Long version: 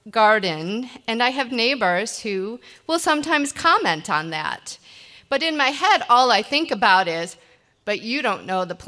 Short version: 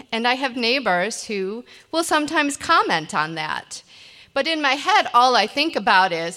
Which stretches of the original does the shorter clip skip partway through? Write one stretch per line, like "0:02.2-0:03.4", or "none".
none